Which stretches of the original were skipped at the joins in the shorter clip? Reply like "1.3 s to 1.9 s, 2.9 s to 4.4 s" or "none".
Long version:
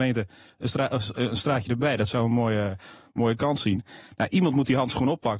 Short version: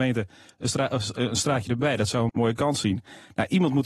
2.3 s to 3.1 s